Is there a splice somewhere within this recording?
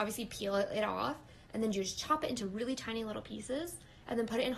no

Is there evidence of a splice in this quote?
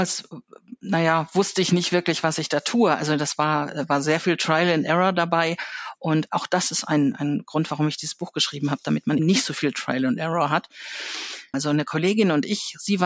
yes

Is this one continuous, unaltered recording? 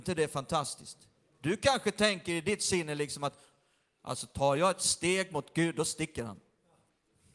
yes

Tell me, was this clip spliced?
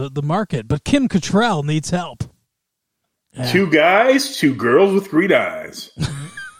yes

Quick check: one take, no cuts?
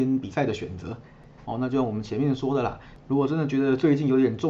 no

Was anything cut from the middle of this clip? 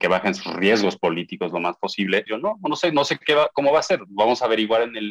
yes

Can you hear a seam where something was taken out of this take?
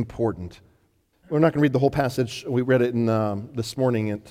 yes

